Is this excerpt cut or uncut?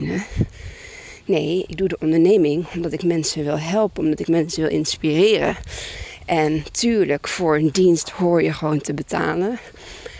uncut